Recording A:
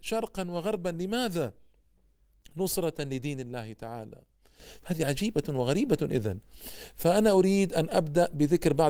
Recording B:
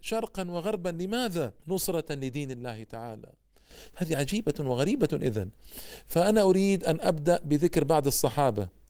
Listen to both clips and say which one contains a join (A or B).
B